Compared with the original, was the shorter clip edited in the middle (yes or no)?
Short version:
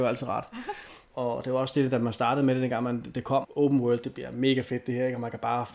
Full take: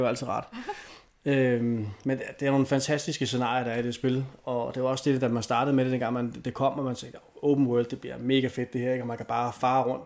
yes